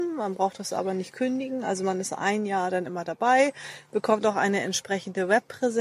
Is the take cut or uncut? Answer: uncut